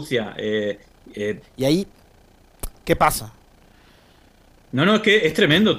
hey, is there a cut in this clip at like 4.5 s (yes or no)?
no